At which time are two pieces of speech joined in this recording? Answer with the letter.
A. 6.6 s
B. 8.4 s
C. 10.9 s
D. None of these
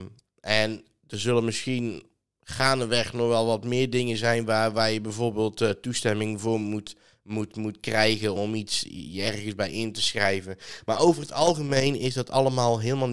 B